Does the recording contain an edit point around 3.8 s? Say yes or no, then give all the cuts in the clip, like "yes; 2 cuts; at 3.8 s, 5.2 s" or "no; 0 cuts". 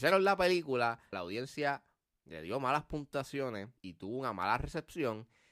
yes; 2 cuts; at 1.1 s, 3.8 s